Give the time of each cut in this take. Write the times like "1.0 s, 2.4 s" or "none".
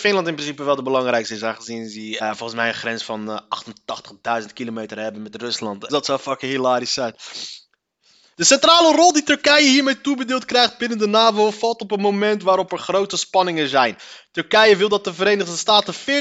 2.2 s, 5.9 s, 8.3 s

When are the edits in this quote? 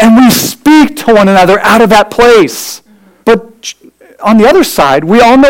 3.2 s

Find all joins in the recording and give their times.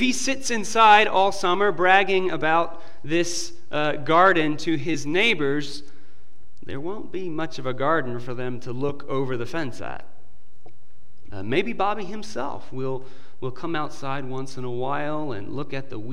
11.3 s

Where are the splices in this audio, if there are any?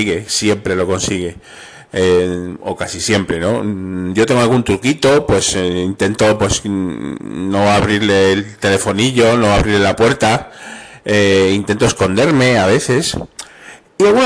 none

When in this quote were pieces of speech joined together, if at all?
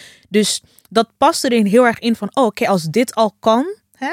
none

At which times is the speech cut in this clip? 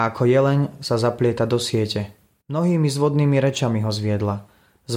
2.4 s

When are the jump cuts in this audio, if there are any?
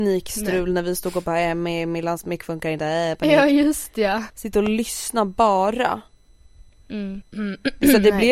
4.3 s, 7.2 s

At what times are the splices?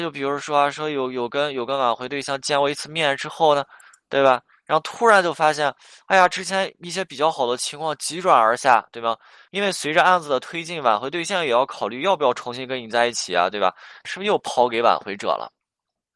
9.5 s, 14.0 s

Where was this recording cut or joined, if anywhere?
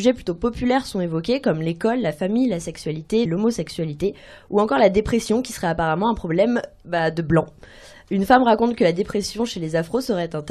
3.3 s

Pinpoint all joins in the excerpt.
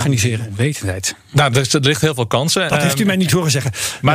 1.5 s, 2.7 s

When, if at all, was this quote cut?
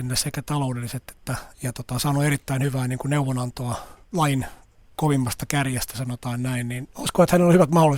1.5 s, 4.0 s, 6.9 s

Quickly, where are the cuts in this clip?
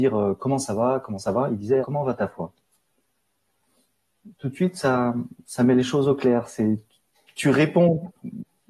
1.8 s

